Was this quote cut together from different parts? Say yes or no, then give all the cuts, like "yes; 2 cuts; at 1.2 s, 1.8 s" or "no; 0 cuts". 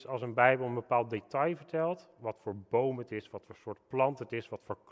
no; 0 cuts